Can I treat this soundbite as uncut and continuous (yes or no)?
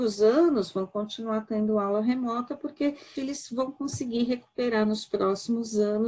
no